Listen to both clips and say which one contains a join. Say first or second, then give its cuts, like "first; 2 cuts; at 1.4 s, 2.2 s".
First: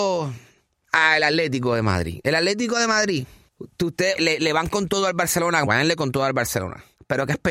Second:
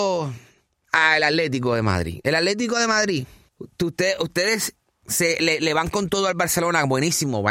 first; 2 cuts; at 4.2 s, 5.7 s